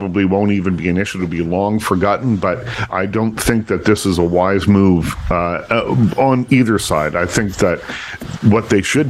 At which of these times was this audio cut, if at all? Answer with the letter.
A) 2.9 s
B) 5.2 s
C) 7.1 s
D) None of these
A